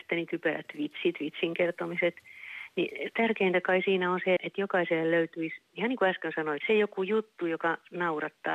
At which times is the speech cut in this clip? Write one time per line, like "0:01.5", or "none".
0:04.4
0:06.6